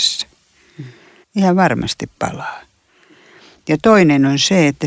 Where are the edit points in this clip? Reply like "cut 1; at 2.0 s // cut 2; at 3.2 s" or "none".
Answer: cut 1; at 1.2 s